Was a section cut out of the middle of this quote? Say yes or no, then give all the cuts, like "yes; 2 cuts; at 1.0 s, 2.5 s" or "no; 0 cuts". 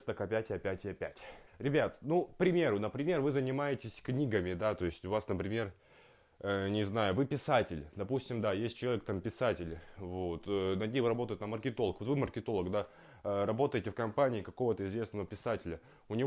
yes; 1 cut; at 1.5 s